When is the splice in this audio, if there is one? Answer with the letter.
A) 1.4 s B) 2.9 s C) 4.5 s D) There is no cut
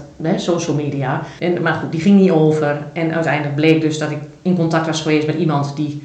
A